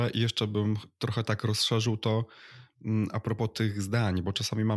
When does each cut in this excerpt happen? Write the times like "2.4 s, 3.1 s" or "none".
none